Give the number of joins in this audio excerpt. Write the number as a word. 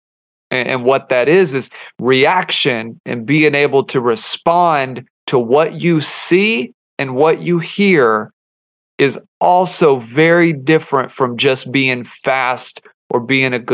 zero